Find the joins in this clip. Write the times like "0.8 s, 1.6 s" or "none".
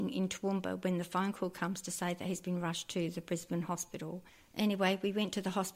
none